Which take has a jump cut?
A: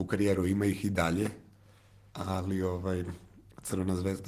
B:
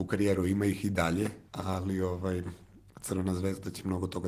B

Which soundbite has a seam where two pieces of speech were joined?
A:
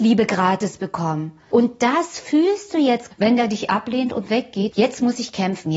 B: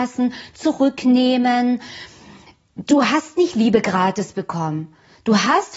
A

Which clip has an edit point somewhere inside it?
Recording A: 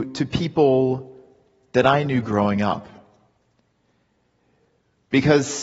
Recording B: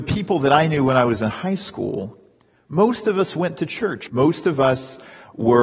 B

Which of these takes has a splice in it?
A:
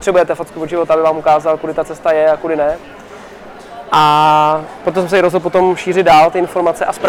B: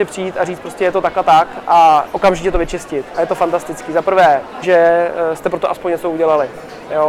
B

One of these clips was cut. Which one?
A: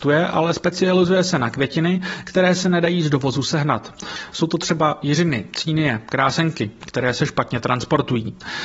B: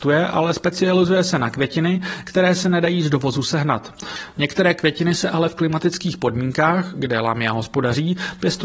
B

